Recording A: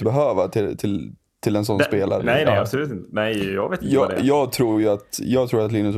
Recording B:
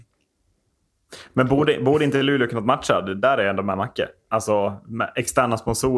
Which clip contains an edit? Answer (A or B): A